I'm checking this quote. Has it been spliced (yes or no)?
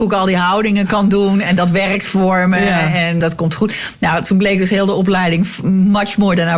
yes